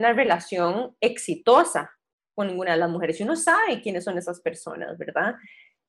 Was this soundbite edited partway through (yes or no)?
no